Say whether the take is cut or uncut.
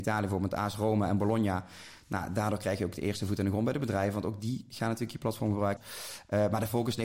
cut